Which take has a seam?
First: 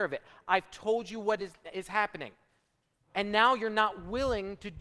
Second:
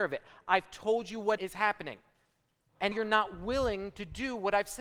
second; 2 cuts; at 1.4 s, 2.9 s

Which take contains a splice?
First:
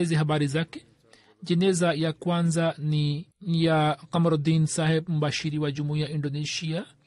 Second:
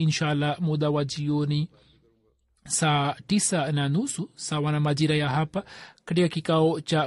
first; 1 cut; at 3.3 s

